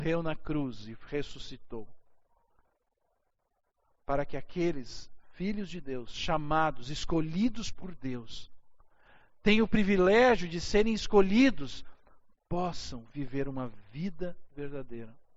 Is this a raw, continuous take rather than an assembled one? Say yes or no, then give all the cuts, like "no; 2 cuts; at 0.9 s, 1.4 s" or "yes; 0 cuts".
yes; 0 cuts